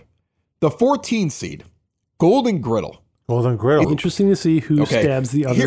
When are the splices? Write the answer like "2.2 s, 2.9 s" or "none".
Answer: 3.8 s